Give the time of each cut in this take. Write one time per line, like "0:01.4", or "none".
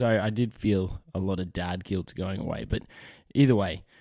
none